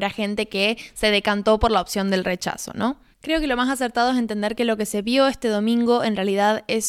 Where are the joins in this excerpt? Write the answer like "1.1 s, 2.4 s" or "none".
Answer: 3.1 s